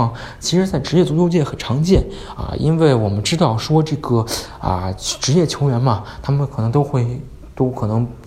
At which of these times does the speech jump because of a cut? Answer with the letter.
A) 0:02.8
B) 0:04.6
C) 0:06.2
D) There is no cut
D